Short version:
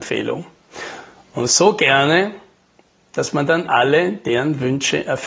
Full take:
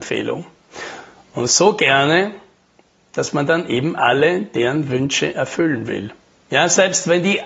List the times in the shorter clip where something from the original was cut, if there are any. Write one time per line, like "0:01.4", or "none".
0:03.7